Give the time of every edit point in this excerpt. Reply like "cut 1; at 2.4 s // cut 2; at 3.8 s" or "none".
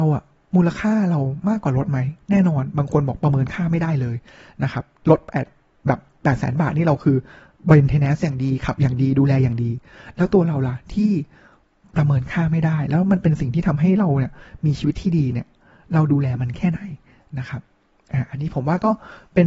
none